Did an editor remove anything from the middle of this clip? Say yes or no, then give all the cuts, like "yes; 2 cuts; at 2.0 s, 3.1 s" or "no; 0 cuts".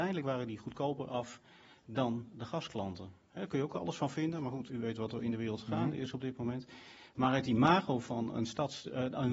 yes; 1 cut; at 4.7 s